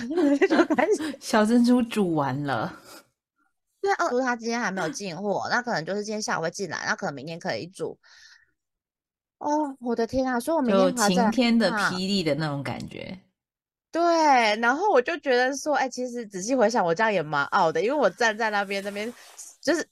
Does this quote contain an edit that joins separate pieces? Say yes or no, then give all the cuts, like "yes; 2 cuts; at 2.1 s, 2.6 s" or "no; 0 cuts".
yes; 1 cut; at 4.1 s